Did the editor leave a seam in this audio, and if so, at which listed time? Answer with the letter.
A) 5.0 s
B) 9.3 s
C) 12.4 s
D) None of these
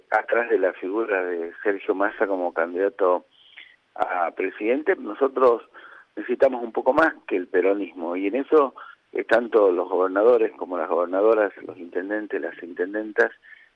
A